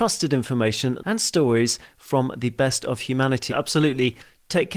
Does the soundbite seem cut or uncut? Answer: cut